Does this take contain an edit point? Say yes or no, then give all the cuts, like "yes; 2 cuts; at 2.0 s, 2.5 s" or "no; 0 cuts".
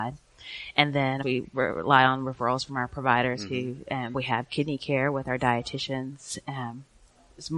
yes; 2 cuts; at 1.2 s, 4.1 s